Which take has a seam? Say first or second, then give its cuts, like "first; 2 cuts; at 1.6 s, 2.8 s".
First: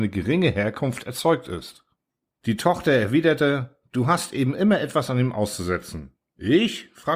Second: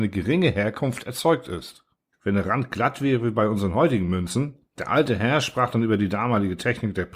second; 2 cuts; at 2.1 s, 4.7 s